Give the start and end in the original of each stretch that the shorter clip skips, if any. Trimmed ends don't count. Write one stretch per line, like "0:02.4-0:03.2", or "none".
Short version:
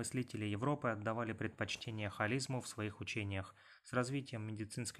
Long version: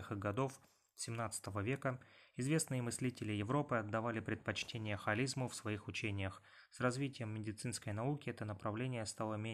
none